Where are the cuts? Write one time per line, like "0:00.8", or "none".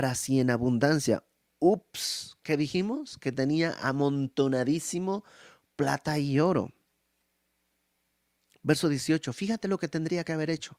none

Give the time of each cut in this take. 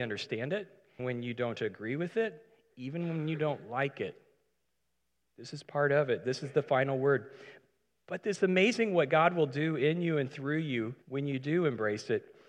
0:01.0
0:11.0

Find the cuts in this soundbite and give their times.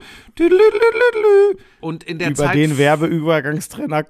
0:01.8

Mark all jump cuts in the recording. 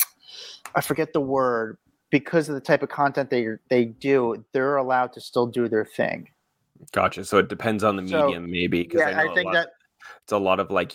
none

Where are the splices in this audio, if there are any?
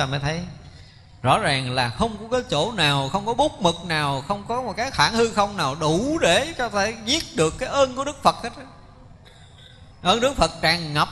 0:09.9

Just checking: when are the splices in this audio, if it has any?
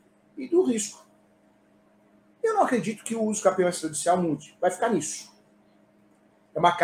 none

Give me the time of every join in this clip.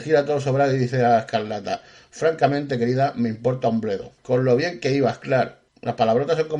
0:04.2
0:05.7

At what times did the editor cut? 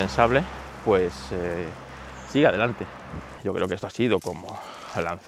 0:03.4

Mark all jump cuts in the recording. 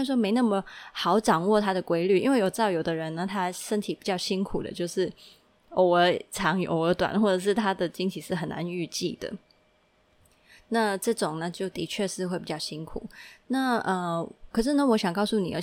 none

